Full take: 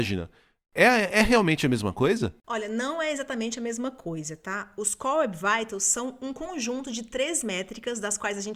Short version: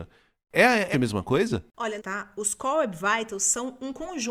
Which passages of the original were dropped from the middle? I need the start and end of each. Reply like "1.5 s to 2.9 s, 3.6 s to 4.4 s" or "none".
1.1 s to 1.6 s, 2.7 s to 4.4 s

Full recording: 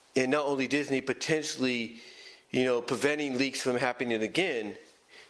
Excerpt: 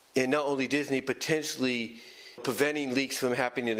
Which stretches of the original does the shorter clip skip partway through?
2.4 s to 2.8 s

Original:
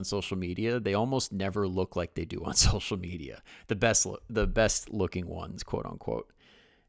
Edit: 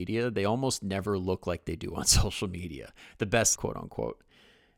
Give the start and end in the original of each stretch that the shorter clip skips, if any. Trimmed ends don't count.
4.0 s to 5.6 s

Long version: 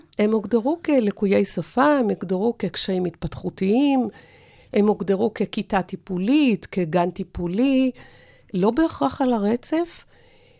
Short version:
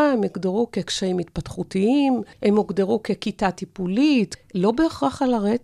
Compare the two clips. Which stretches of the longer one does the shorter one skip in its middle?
4.2 s to 4.6 s, 6.7 s to 8.3 s

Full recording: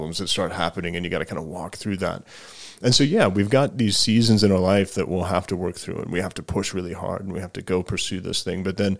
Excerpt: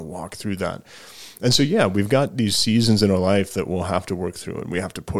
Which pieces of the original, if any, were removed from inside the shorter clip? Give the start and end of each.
none

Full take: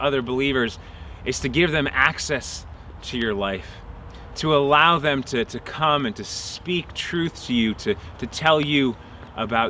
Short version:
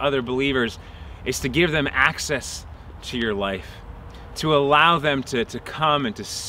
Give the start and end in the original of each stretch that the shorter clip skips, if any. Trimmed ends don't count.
none

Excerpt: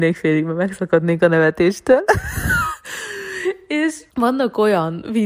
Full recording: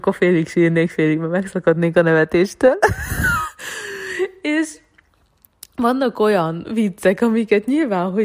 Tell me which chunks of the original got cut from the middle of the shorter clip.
4.8 s to 5.7 s

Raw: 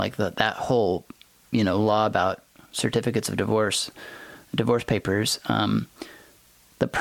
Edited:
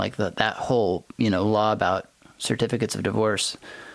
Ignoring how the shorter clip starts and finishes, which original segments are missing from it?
1.1 s to 1.5 s

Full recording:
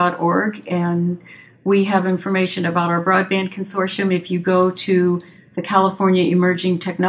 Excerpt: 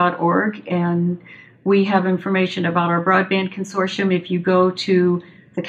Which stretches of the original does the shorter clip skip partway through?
none

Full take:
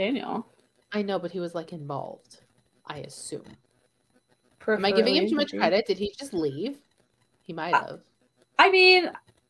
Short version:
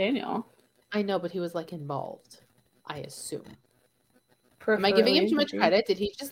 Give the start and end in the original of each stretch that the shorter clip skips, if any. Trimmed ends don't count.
none

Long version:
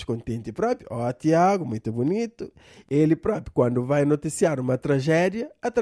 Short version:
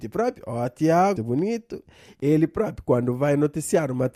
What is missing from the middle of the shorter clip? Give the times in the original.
1.6 s to 1.8 s

